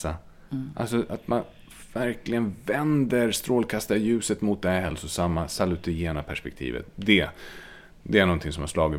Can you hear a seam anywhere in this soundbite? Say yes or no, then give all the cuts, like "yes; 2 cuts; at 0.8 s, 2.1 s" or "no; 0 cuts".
no; 0 cuts